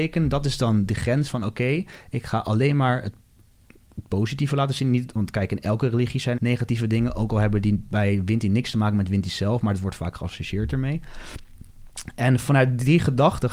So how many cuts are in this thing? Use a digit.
1